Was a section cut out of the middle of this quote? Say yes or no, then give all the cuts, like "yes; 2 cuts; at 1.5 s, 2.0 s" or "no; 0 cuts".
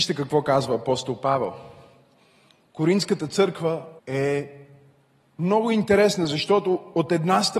yes; 2 cuts; at 2.7 s, 4.0 s